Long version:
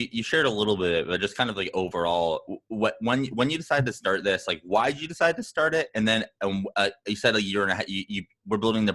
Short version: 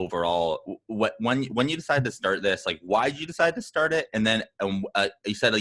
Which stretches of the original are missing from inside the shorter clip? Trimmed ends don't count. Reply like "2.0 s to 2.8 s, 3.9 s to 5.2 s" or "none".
none

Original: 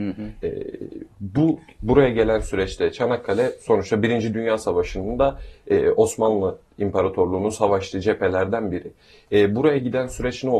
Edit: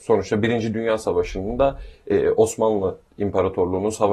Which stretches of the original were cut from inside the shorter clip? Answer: none

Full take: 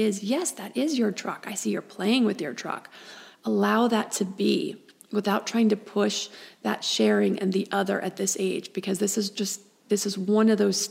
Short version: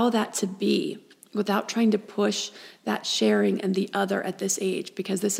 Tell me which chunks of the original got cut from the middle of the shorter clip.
none

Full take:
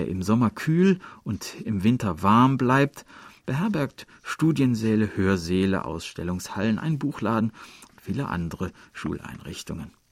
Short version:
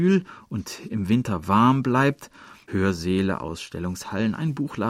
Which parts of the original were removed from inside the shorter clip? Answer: 3.4 s to 5.1 s

